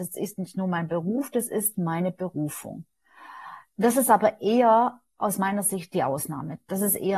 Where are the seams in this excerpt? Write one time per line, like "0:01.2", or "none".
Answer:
0:01.7